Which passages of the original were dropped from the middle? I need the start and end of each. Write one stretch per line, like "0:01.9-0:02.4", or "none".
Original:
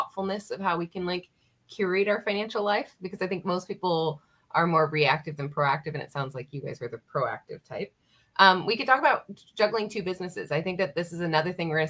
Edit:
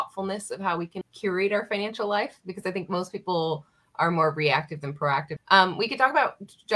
0:01.0-0:01.6
0:05.9-0:08.2